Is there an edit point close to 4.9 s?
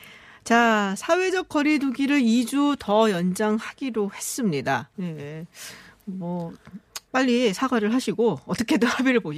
yes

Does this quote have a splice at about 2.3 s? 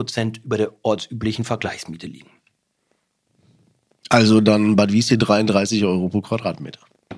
no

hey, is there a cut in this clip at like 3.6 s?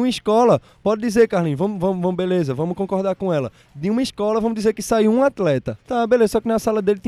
no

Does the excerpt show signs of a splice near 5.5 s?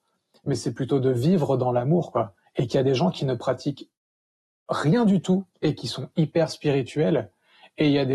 yes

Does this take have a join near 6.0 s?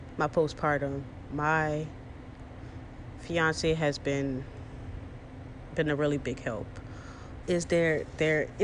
no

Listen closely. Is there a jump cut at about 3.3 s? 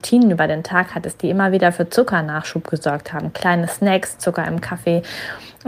no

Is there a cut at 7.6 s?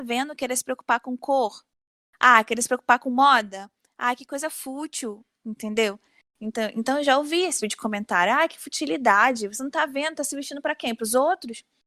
yes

